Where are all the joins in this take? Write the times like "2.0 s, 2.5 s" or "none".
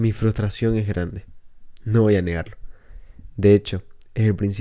none

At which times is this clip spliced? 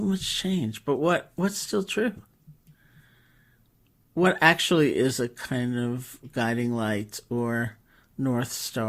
none

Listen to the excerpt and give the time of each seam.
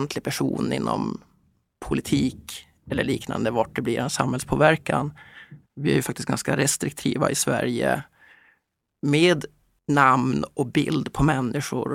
5.6 s

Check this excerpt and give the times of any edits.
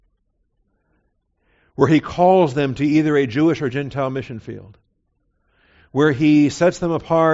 none

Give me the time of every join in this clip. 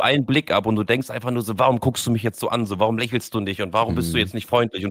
none

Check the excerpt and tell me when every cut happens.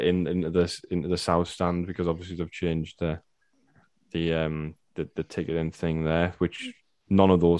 none

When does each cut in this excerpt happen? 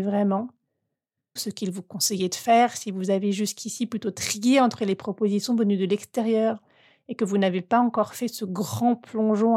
1.4 s

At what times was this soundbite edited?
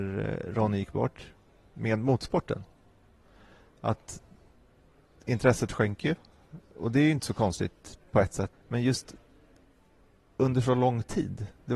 8.5 s

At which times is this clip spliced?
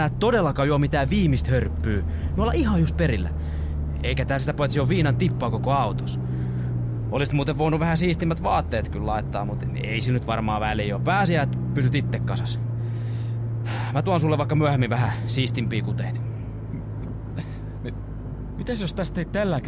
none

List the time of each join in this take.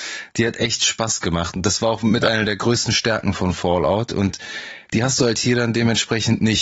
none

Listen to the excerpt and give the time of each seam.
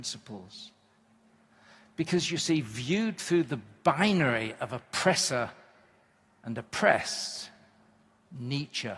none

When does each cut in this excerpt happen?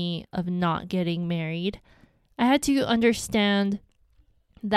none

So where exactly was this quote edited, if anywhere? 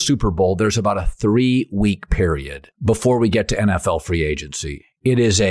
2.7 s

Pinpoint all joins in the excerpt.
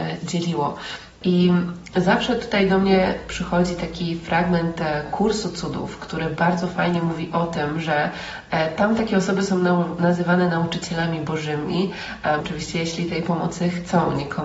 1.2 s, 12.4 s

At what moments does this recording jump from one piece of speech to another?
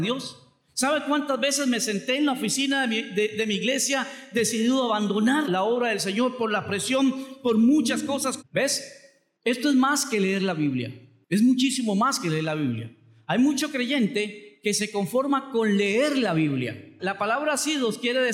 5.4 s, 8.4 s, 17.0 s

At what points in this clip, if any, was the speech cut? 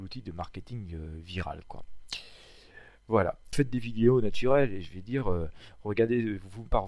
3.5 s

